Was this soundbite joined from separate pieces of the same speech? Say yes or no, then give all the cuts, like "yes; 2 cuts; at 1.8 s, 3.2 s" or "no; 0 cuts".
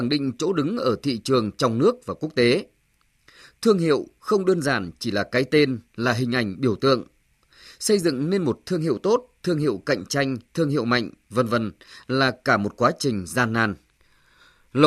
no; 0 cuts